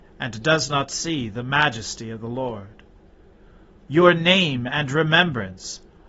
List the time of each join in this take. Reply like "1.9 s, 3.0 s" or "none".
3.8 s